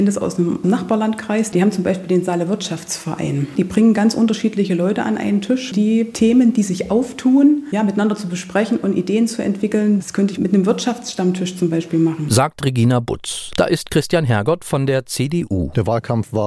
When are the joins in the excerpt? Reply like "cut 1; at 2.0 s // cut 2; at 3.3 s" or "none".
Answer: cut 1; at 5.7 s // cut 2; at 13.5 s